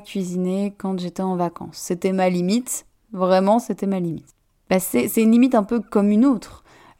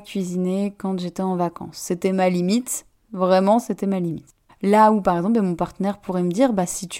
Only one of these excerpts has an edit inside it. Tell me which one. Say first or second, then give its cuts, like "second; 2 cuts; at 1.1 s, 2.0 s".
second; 1 cut; at 4.5 s